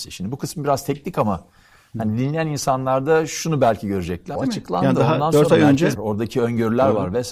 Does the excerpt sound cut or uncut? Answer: cut